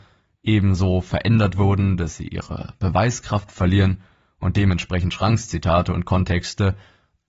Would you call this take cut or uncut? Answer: uncut